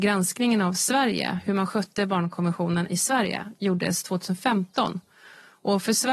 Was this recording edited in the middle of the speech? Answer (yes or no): no